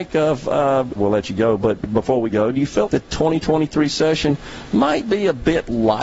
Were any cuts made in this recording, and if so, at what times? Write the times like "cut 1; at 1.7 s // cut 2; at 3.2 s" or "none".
cut 1; at 1.0 s // cut 2; at 2.9 s